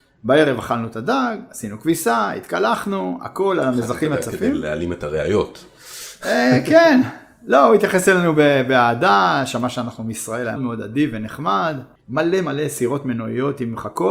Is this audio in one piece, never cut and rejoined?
no; 2 cuts; at 10.6 s, 12.0 s

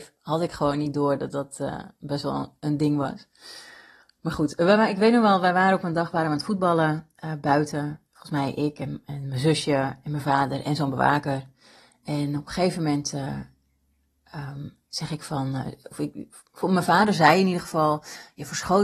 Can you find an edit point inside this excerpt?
no; 0 cuts

